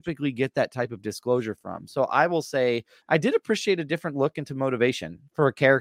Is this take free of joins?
no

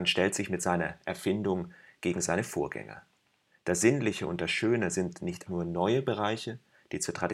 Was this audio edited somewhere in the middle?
yes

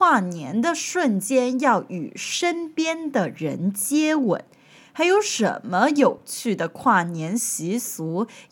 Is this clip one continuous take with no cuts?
yes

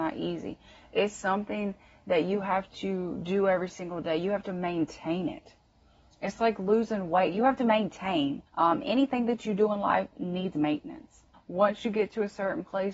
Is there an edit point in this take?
yes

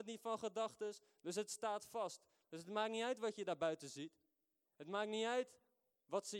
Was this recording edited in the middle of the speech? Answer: no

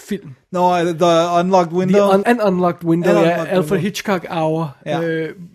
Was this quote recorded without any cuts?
no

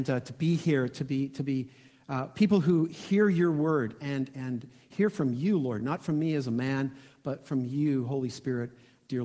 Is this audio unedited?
yes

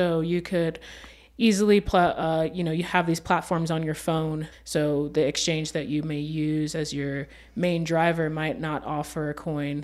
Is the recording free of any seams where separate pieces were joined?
no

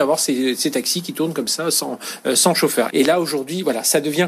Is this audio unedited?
no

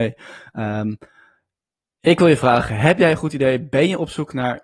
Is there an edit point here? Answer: no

